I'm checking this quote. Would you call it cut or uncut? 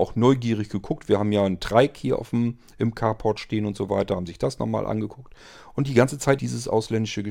cut